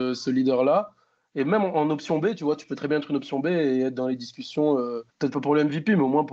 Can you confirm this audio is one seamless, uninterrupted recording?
no; 1 cut; at 5.1 s

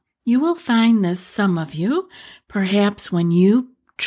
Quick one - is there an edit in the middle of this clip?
no; 0 cuts

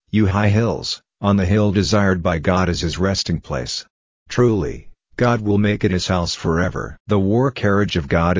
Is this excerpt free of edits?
yes; 0 cuts

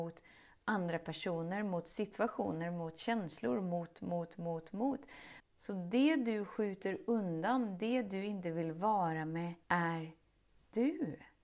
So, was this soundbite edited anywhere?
yes; 3 cuts; at 4.4 s, 5.4 s, 9.6 s

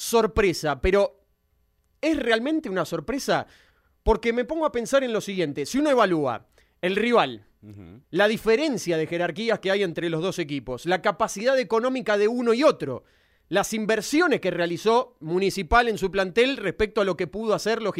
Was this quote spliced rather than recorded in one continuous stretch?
yes; 1 cut; at 8.0 s

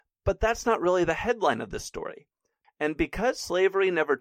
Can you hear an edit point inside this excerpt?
yes; 1 cut; at 2.6 s

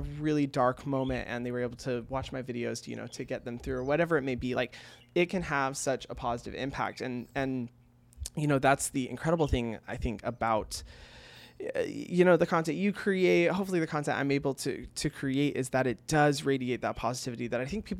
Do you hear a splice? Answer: no; 0 cuts

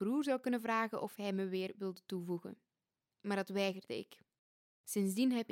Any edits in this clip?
no; 0 cuts

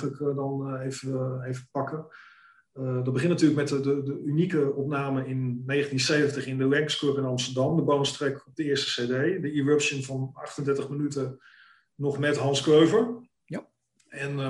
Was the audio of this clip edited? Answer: no; 0 cuts

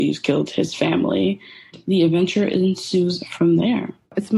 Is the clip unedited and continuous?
yes; 0 cuts

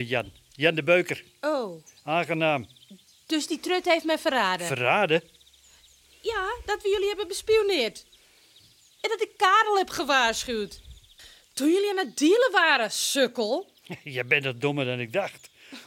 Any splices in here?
no; 0 cuts

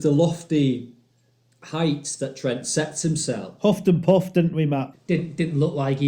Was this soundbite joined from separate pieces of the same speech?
yes; 2 cuts; at 3.6 s, 4.9 s

